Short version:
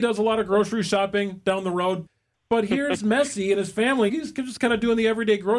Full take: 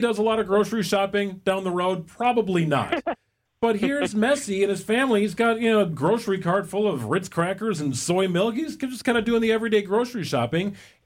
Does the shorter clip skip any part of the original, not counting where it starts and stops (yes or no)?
yes